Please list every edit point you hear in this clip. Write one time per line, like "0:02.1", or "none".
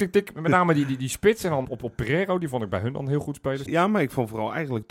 0:01.6
0:03.7

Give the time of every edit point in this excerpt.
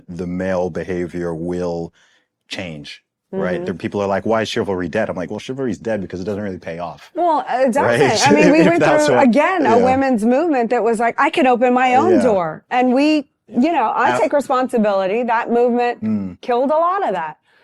none

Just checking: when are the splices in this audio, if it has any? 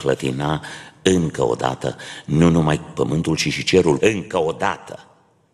0:04.0

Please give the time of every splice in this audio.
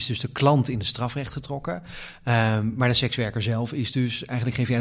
none

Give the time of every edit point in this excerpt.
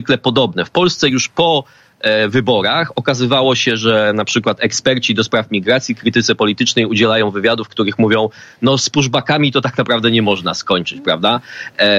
none

